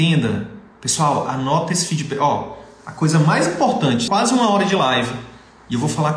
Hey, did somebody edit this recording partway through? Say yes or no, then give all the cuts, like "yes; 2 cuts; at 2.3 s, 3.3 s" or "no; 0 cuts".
yes; 1 cut; at 4.1 s